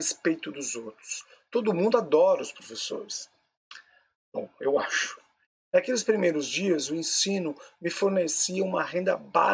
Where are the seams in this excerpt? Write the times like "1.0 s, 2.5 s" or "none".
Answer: 5.7 s